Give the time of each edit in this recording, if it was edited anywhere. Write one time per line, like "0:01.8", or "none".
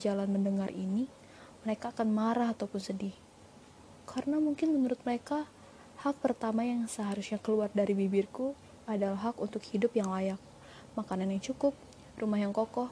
none